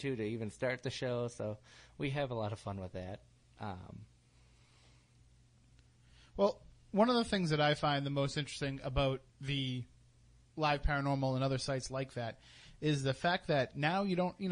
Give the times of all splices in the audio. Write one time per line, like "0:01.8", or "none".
0:09.3